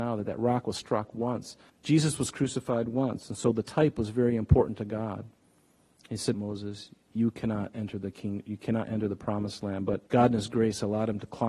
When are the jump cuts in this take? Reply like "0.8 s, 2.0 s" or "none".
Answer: 1.7 s, 6.3 s, 10.1 s